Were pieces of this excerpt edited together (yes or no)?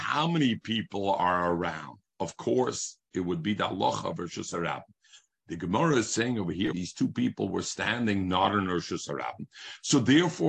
yes